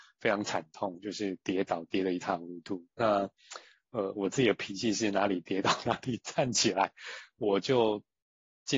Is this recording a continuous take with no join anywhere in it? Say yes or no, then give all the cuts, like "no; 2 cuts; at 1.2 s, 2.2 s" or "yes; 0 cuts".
no; 1 cut; at 4.1 s